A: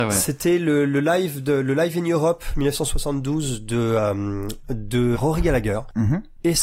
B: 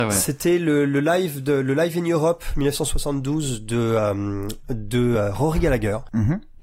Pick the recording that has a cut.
A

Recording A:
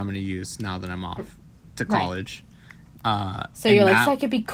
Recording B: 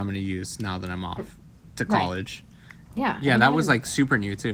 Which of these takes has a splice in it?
B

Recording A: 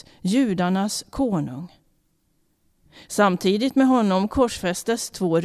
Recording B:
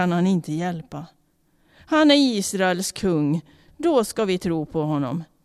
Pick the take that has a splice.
B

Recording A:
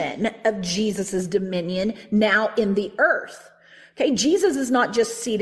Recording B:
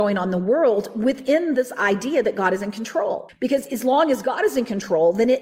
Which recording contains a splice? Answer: B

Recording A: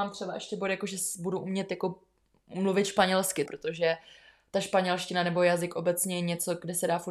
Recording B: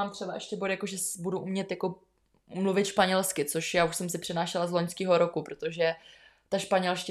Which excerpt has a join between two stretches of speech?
A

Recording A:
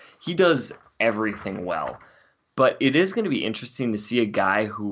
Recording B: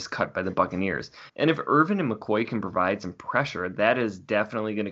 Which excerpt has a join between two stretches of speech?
B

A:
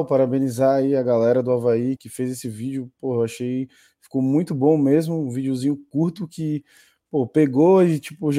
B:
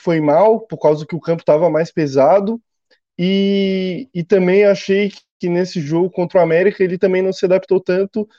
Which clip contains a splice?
A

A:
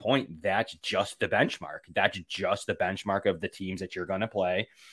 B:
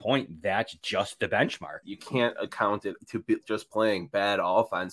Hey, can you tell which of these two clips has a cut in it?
B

